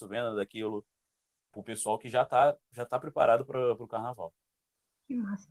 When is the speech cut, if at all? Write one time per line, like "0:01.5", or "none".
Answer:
0:01.4